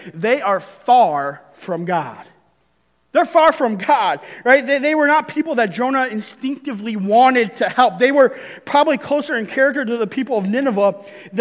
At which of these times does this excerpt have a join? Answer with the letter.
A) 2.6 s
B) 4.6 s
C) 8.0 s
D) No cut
D